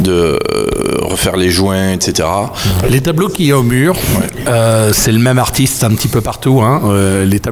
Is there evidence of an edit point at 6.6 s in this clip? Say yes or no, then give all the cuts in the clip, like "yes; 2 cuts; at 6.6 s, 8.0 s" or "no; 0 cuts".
no; 1 cut; at 2.8 s